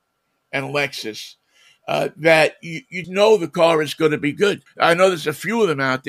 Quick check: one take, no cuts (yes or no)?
no